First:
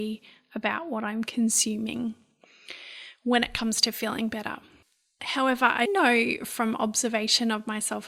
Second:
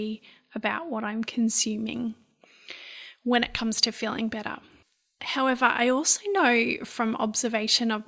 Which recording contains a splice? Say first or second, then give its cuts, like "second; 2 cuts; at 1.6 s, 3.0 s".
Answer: first; 1 cut; at 5.8 s